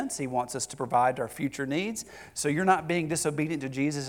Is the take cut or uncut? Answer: uncut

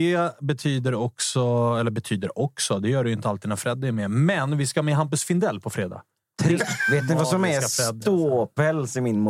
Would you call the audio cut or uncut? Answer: cut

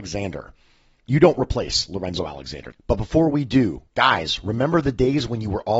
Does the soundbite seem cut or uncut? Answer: cut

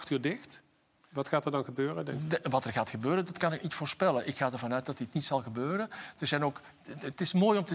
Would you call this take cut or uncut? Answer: uncut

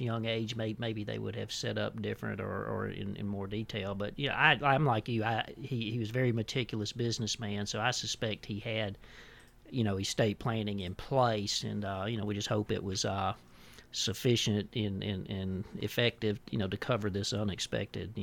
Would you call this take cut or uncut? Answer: uncut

